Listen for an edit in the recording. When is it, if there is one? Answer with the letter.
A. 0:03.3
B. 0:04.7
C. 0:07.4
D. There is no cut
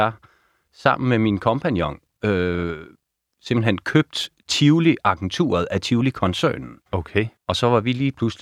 C